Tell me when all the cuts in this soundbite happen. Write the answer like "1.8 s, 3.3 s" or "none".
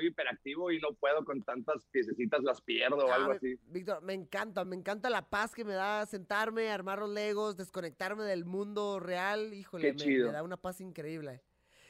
none